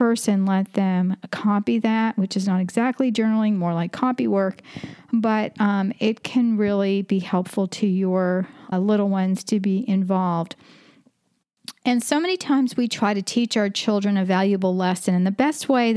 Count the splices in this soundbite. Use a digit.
1